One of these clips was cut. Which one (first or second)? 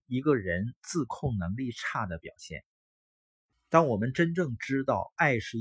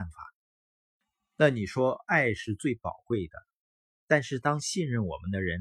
first